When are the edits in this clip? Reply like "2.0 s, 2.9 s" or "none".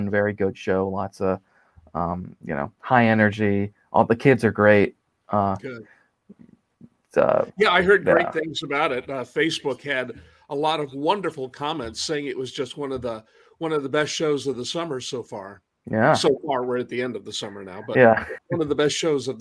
18.4 s